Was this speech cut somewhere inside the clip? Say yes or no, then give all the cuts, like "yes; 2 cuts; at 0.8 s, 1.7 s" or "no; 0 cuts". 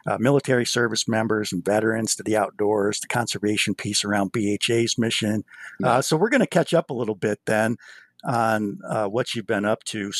yes; 1 cut; at 5.8 s